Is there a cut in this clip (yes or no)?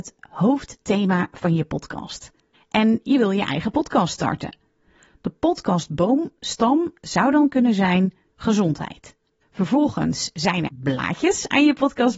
yes